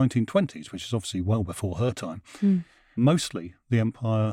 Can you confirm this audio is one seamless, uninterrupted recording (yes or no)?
yes